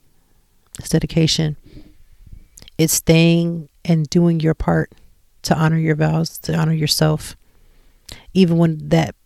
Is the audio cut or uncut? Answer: uncut